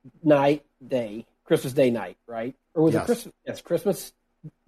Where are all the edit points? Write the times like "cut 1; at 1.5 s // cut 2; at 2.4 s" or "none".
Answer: none